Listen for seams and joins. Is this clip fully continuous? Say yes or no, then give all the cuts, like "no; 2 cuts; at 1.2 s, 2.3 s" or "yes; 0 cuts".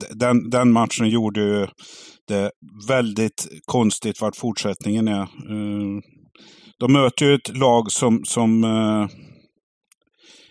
yes; 0 cuts